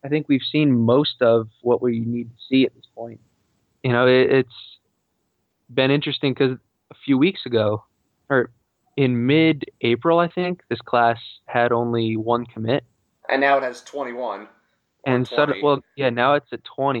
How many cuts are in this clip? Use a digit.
0